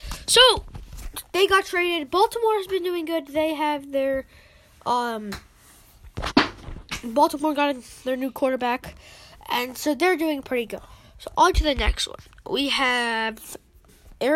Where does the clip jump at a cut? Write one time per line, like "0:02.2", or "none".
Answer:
none